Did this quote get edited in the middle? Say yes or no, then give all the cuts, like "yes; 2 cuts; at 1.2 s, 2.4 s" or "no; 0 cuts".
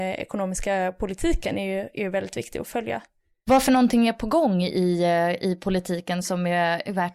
no; 0 cuts